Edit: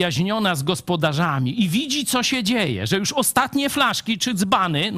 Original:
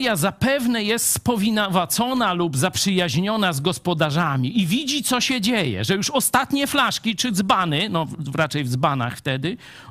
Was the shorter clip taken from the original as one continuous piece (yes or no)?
yes